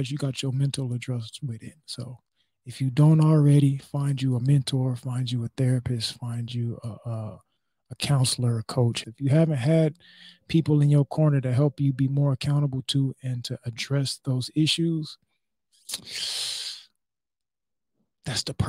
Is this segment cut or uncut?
cut